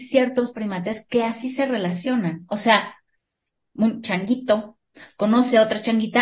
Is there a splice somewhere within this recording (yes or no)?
no